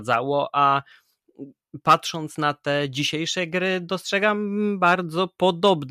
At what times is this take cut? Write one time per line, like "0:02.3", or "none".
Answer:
none